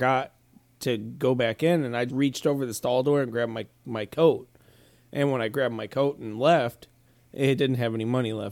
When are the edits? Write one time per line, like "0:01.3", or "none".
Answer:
0:02.1

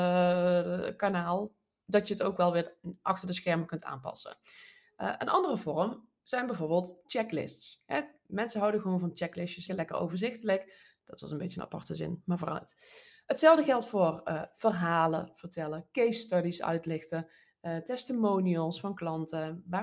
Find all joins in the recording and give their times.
0:09.7
0:11.0

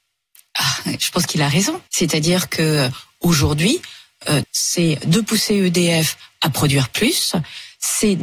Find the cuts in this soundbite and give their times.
0:01.9
0:04.4

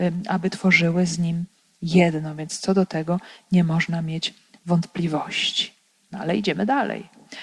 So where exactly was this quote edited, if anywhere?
none

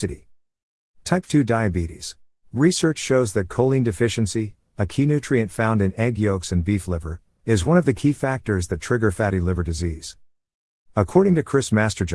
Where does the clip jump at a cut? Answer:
0:02.4

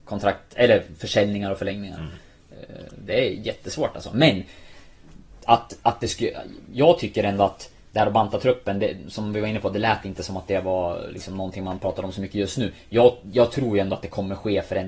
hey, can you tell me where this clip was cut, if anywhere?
none

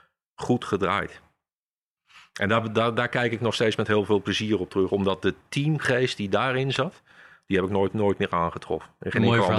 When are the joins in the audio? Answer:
none

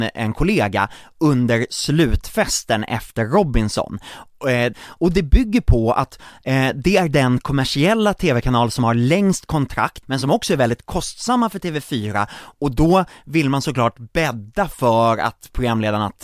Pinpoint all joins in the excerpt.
0:04.7
0:10.0

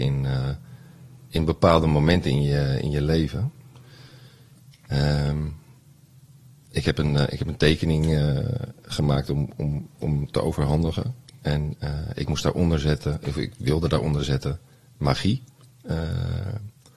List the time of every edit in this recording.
none

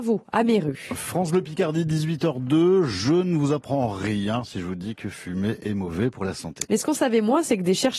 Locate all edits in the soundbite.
0:06.6

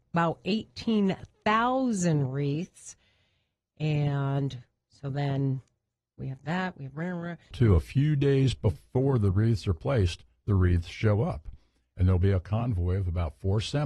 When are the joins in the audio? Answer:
0:07.5

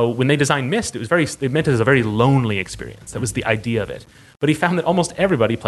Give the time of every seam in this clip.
none

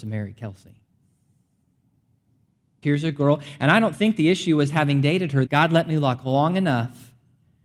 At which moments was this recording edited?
0:02.8
0:05.5

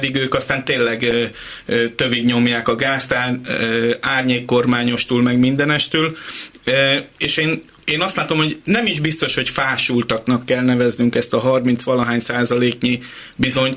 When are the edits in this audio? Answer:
none

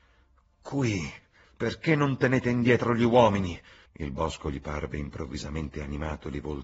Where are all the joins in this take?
0:01.4
0:03.9

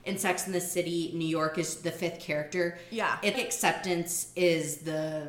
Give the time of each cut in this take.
0:03.3

